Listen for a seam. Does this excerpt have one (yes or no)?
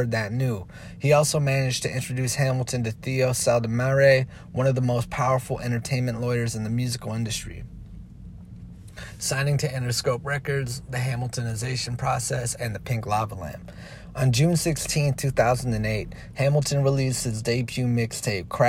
no